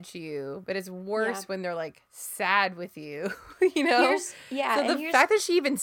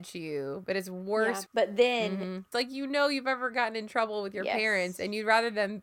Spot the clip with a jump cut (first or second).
second